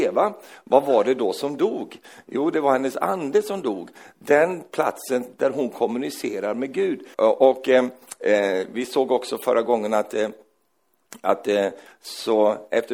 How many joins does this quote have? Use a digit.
2